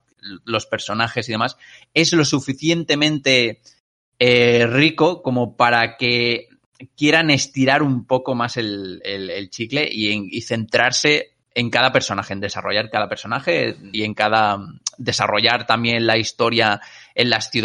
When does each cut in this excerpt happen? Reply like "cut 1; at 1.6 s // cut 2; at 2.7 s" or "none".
cut 1; at 11.4 s // cut 2; at 13.9 s